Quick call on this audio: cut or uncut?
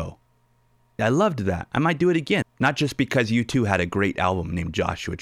cut